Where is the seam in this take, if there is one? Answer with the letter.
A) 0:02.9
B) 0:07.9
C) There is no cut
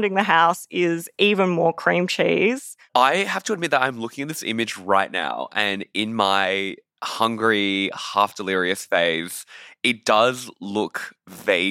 C